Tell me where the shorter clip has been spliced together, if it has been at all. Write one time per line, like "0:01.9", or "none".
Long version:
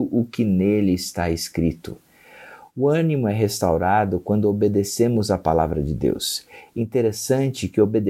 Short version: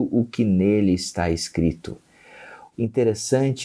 0:02.7